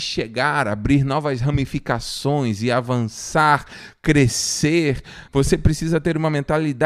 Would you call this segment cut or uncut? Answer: cut